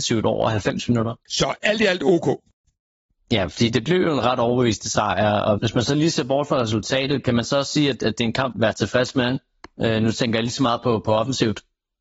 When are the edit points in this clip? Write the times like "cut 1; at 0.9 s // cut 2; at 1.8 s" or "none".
cut 1; at 1.3 s // cut 2; at 5.6 s // cut 3; at 8.5 s

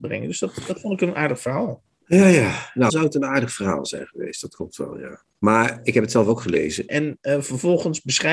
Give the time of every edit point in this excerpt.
cut 1; at 2.9 s // cut 2; at 5.3 s // cut 3; at 6.9 s

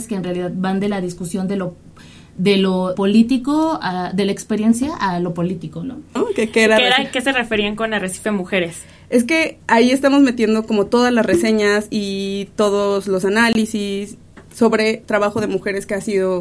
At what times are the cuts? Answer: cut 1; at 2.9 s // cut 2; at 6.2 s

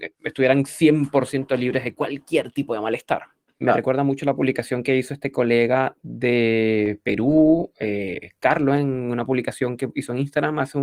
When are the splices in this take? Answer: cut 1; at 3.6 s

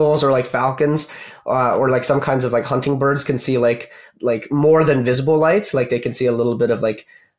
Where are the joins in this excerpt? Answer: cut 1; at 4.1 s

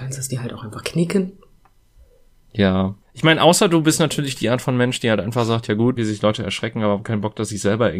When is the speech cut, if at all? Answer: cut 1; at 3.0 s // cut 2; at 6.0 s

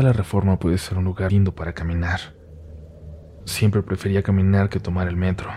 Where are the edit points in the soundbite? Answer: cut 1; at 1.3 s // cut 2; at 3.4 s

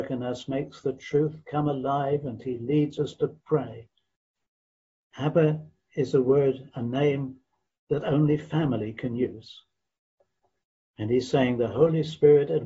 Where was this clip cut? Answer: cut 1; at 5.0 s

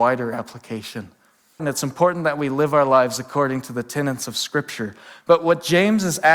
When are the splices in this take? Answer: cut 1; at 1.6 s

